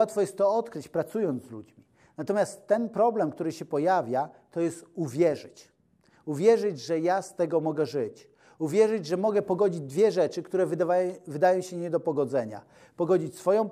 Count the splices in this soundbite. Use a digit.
0